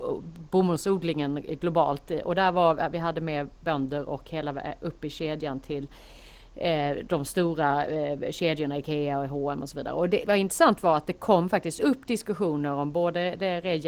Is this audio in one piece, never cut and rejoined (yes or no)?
no